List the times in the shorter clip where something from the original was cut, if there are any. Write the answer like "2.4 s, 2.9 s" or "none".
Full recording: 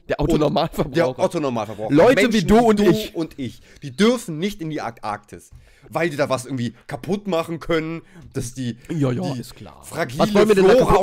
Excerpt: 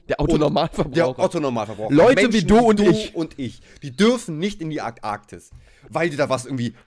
none